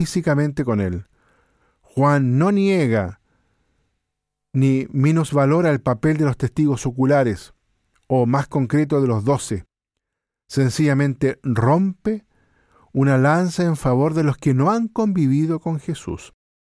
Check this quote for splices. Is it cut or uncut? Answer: uncut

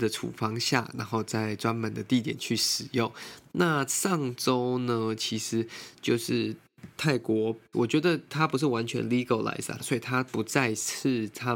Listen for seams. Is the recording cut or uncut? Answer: cut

